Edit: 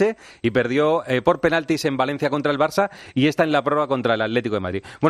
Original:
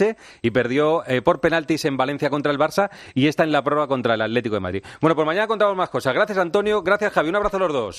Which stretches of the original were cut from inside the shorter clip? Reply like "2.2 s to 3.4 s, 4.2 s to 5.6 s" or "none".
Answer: none